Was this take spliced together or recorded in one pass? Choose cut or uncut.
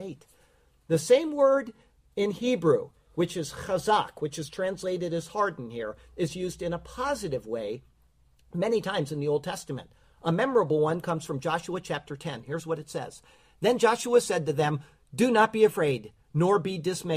uncut